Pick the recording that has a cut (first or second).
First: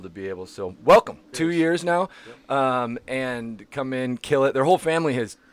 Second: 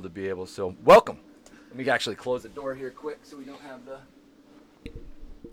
first